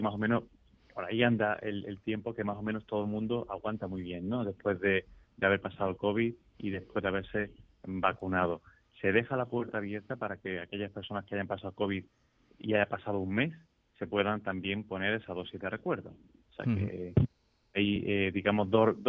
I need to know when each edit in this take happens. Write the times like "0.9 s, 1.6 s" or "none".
none